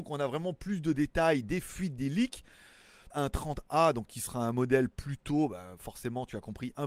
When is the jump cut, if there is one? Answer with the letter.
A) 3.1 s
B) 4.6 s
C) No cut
A